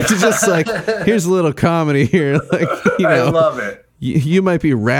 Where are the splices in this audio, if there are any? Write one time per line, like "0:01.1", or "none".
none